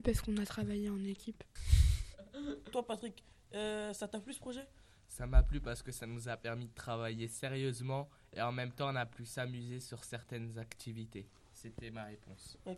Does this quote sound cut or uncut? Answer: uncut